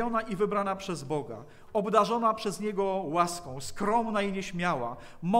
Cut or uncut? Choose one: uncut